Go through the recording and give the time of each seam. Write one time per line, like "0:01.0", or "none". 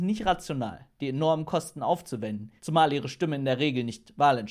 0:02.6